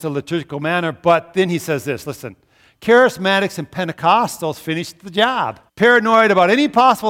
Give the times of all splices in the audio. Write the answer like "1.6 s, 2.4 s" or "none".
5.7 s